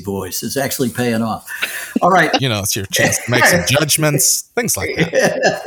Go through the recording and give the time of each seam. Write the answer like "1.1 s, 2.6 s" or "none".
2.4 s